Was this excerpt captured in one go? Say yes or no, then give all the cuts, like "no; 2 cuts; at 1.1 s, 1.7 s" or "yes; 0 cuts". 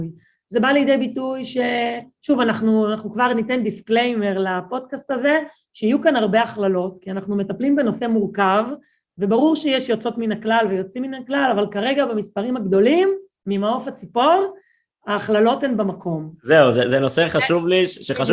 yes; 0 cuts